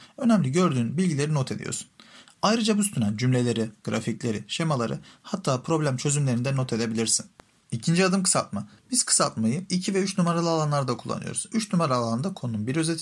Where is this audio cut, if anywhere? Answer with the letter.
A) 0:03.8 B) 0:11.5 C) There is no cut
A